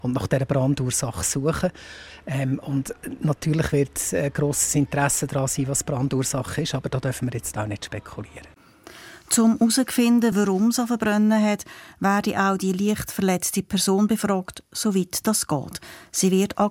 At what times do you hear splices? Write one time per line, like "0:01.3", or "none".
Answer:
none